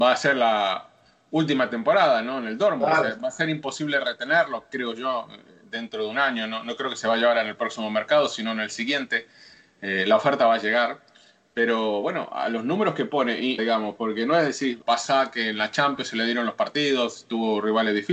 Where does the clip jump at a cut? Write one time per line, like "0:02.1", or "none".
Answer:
0:13.6
0:14.8